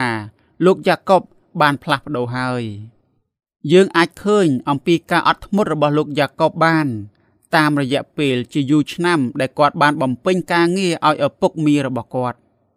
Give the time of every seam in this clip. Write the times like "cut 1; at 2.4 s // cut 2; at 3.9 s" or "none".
none